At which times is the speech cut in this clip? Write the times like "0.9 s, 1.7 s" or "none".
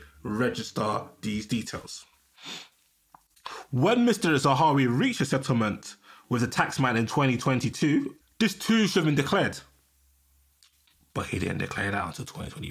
8.2 s